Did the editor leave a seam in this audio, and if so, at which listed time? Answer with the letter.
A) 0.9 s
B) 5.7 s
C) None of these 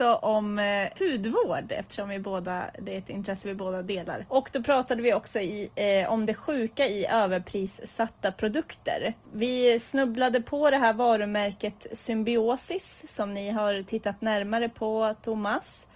C